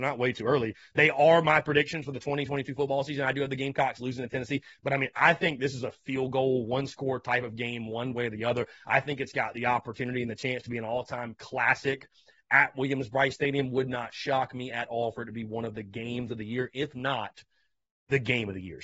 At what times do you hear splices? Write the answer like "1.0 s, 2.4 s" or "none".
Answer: none